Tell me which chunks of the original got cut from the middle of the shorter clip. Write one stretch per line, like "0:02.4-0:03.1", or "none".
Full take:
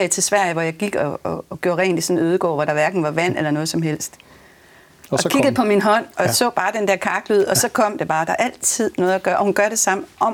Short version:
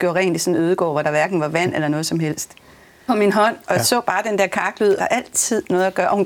0:04.7-0:05.6
0:07.5-0:08.2